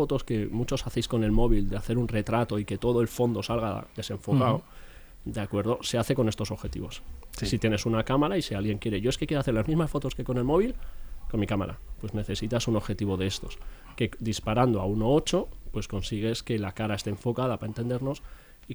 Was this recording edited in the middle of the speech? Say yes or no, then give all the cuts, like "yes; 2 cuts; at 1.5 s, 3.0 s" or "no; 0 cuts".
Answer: no; 0 cuts